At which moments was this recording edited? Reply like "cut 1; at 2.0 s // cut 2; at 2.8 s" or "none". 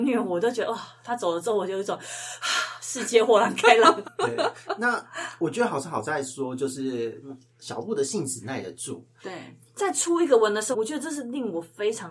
cut 1; at 4.0 s // cut 2; at 9.2 s // cut 3; at 10.7 s